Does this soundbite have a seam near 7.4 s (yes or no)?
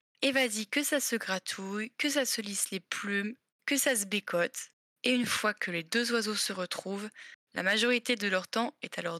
yes